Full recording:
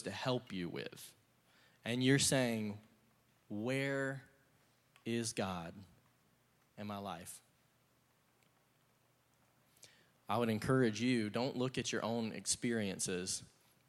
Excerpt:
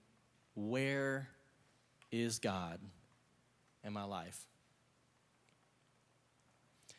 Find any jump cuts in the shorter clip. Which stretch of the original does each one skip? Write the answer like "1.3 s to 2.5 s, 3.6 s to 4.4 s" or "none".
none